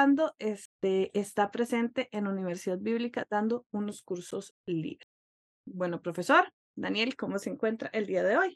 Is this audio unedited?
yes; 0 cuts

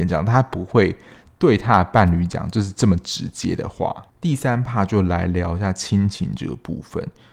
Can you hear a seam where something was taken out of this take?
yes; 1 cut; at 4.1 s

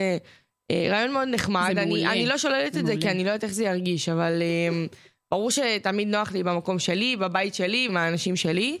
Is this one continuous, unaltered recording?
no; 1 cut; at 7.9 s

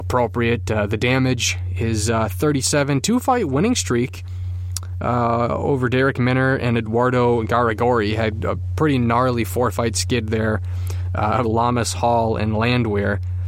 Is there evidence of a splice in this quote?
yes; 1 cut; at 11.4 s

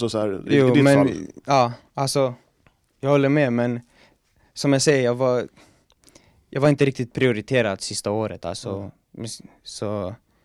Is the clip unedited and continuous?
yes; 0 cuts

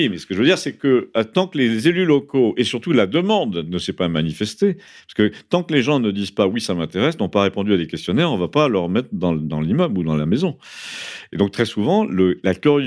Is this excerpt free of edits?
yes; 0 cuts

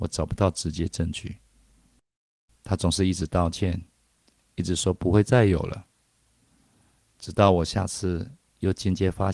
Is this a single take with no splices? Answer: no; 1 cut; at 2.6 s

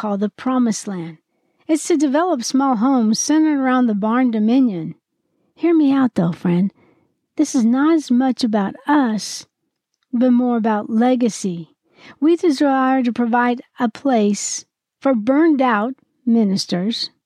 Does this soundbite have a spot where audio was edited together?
no; 0 cuts

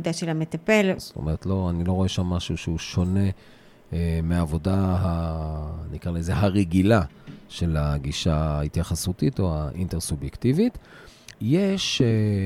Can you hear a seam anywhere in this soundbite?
yes; 2 cuts; at 1.0 s, 11.3 s

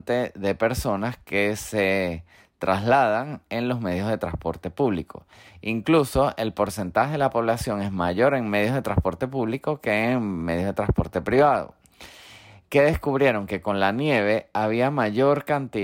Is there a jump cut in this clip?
no; 0 cuts

